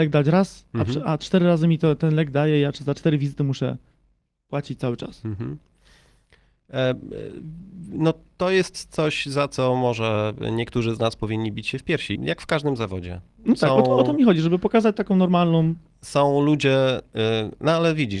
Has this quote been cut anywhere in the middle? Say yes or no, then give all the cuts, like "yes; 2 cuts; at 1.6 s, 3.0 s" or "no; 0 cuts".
yes; 1 cut; at 12.2 s